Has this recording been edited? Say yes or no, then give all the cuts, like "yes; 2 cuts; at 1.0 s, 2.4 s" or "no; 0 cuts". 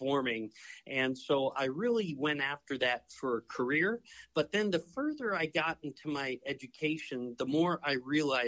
no; 0 cuts